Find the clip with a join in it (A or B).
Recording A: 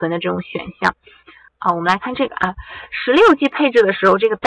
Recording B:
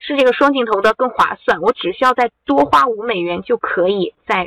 A